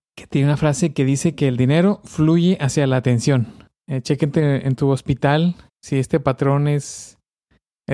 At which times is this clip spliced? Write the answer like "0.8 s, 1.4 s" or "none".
3.8 s, 5.7 s